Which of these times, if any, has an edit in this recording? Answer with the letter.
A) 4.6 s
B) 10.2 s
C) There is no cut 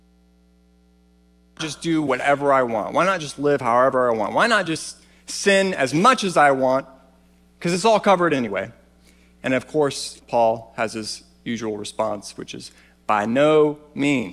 B